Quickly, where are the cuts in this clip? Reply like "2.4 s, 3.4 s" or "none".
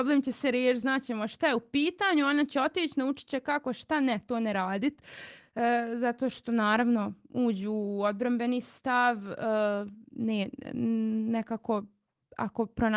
none